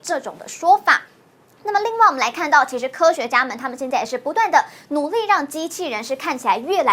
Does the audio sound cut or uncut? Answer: uncut